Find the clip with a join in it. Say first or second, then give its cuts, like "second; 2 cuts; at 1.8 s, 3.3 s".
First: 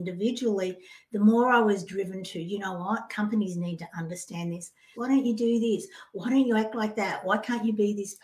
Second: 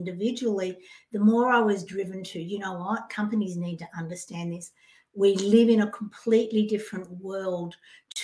first; 1 cut; at 4.9 s